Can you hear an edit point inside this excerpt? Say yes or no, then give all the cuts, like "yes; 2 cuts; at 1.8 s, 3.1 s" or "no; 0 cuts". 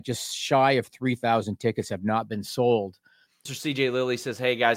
yes; 1 cut; at 3.5 s